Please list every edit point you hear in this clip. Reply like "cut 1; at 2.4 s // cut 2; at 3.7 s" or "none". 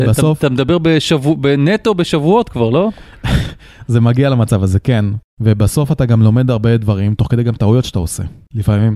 none